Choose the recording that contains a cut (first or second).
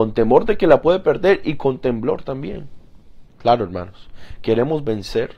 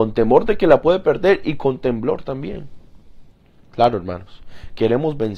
first